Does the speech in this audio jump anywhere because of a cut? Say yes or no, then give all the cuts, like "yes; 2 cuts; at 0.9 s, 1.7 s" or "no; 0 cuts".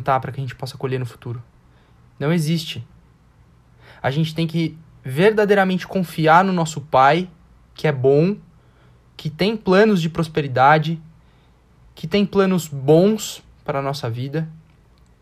no; 0 cuts